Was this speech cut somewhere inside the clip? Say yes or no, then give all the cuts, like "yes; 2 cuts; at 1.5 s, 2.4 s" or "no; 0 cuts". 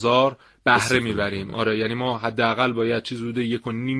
no; 0 cuts